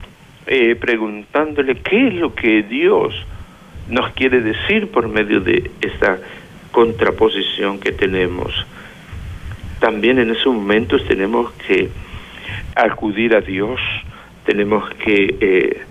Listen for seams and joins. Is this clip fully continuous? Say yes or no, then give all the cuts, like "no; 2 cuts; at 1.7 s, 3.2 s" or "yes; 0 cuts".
no; 2 cuts; at 9.8 s, 12.7 s